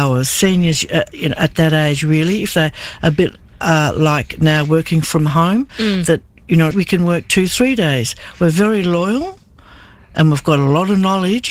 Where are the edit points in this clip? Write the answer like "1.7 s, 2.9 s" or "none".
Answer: 6.7 s